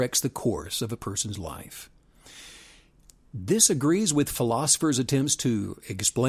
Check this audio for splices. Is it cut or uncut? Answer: uncut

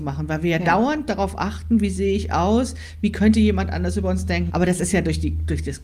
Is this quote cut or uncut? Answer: cut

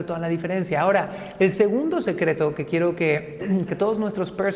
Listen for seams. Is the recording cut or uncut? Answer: cut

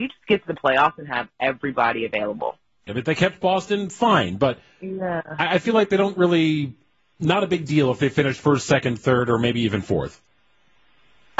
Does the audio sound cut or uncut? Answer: cut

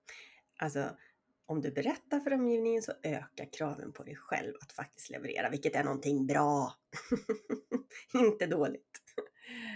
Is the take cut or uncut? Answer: uncut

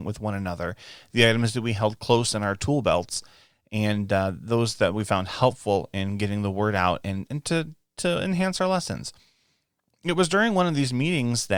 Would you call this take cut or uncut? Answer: uncut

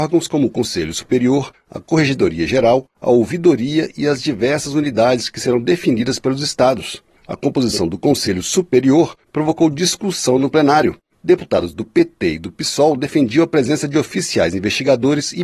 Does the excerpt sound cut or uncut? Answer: uncut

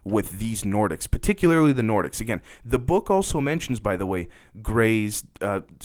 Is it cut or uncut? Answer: uncut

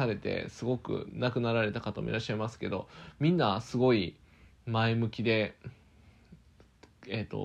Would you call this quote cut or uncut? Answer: uncut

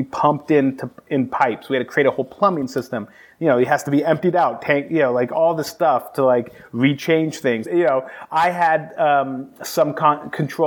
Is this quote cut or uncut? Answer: cut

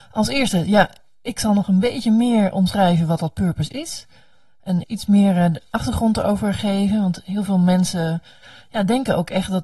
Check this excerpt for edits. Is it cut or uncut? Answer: cut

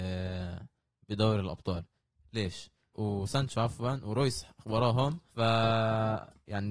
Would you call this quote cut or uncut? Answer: cut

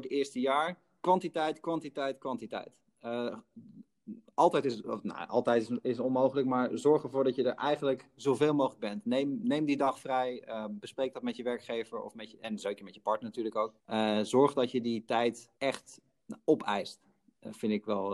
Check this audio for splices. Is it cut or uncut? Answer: cut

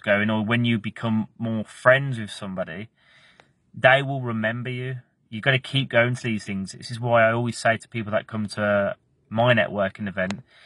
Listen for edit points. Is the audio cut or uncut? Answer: uncut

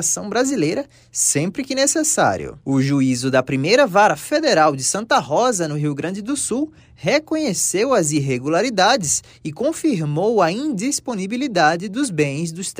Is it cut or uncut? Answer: cut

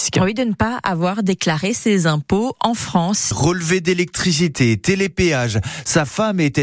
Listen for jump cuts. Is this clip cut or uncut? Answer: cut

